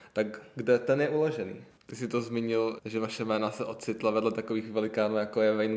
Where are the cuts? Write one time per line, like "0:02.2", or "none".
0:01.7
0:02.8